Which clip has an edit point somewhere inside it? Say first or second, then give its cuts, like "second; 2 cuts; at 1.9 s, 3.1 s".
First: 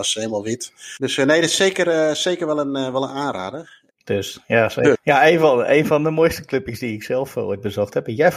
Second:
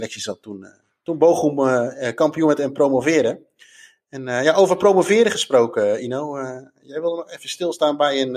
first; 3 cuts; at 1.0 s, 3.9 s, 4.9 s